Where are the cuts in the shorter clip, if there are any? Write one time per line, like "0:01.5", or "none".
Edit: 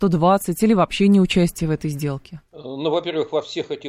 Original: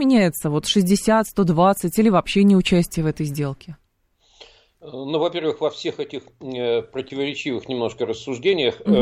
0:02.5